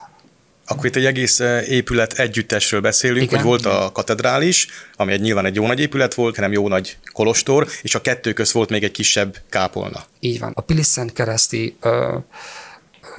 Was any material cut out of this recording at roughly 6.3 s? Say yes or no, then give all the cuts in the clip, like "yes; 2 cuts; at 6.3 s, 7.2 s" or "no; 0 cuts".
yes; 2 cuts; at 6.3 s, 10.5 s